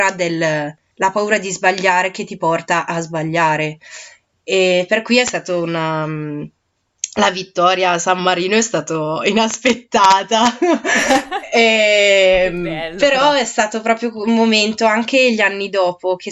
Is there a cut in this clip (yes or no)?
no